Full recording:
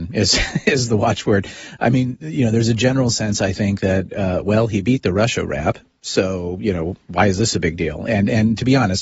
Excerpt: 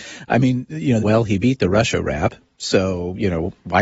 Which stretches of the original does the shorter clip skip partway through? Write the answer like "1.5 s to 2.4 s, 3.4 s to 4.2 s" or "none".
2.5 s to 4.4 s